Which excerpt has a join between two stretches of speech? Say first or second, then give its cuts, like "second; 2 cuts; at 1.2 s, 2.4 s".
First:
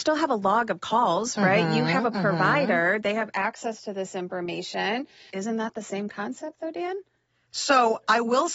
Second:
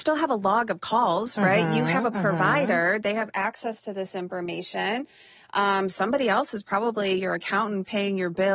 first; 1 cut; at 5.3 s